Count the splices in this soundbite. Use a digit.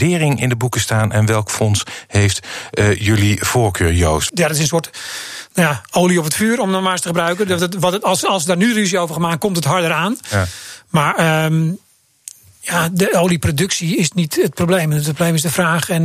1